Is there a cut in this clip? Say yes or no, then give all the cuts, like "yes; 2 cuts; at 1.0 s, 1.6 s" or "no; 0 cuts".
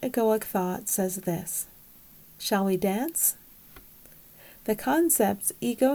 no; 0 cuts